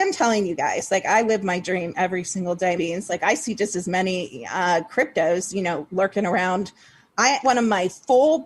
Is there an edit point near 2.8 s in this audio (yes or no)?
yes